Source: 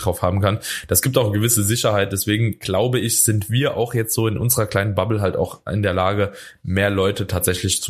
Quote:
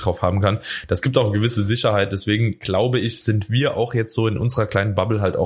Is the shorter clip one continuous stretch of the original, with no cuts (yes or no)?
yes